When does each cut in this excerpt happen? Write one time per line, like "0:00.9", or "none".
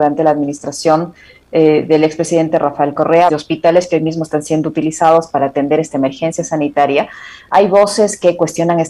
0:03.3